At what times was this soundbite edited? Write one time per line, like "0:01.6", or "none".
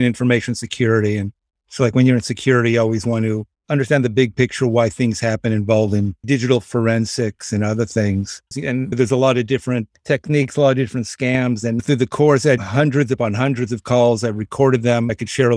0:08.5